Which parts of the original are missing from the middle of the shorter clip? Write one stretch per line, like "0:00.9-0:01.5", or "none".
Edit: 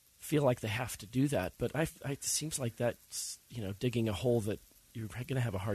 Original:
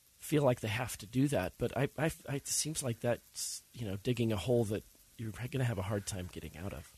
0:01.7-0:01.9